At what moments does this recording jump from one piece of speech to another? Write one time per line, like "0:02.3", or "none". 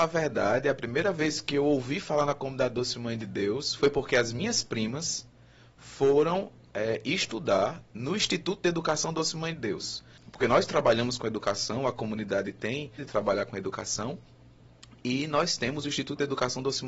0:10.2
0:13.0